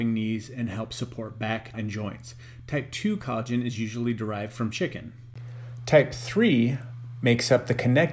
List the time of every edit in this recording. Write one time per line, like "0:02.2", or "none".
0:01.7